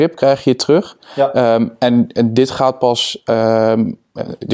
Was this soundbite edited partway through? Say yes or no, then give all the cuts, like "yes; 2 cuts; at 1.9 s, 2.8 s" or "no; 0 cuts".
no; 0 cuts